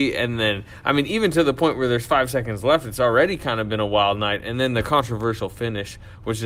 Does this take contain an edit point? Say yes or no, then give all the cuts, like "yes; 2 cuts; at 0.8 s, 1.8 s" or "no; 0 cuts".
no; 0 cuts